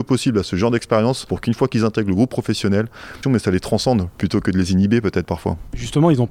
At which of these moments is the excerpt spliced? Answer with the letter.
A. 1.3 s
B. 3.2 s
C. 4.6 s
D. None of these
B